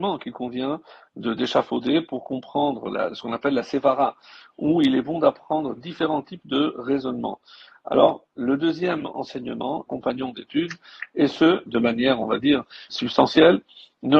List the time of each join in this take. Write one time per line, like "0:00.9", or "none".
0:09.9
0:11.7
0:12.9

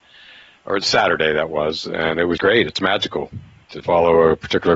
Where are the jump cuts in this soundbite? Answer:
0:02.4
0:03.8

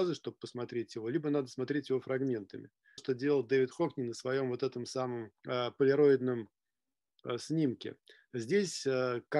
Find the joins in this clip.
0:03.0
0:05.4

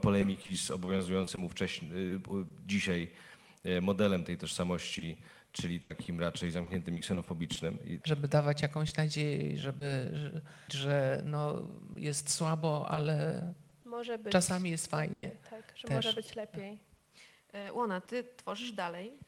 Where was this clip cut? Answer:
0:08.0
0:10.7

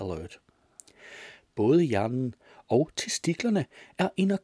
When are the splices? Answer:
none

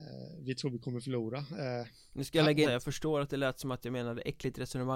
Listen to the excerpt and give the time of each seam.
0:02.6

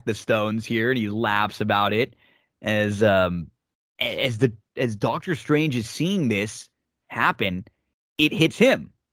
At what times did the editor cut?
none

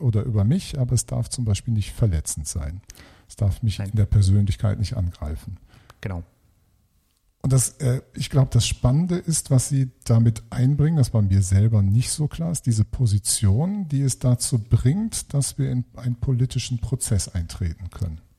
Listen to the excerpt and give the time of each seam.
none

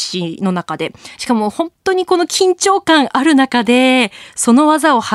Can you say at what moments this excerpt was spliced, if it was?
0:01.2

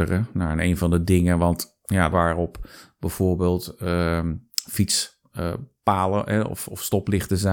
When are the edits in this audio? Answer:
0:02.1

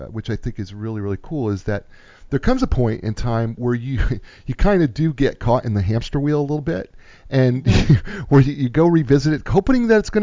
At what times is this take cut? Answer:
none

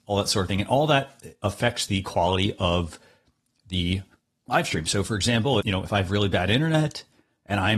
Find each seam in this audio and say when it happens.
0:05.6

